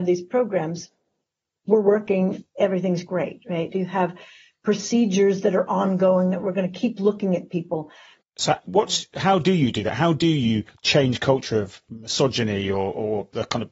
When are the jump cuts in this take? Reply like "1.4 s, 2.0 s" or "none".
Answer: 3.7 s, 8.2 s